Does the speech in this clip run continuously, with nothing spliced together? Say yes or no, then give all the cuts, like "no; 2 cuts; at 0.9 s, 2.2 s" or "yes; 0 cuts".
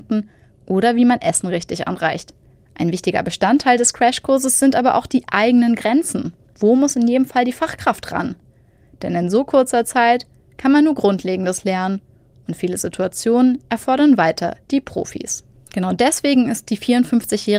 yes; 0 cuts